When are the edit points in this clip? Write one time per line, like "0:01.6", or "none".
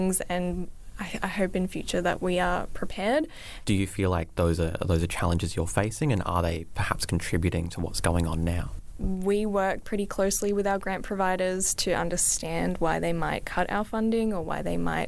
0:03.6